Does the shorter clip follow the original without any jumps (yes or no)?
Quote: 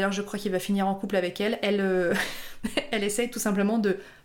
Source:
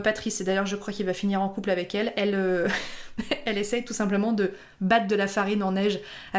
yes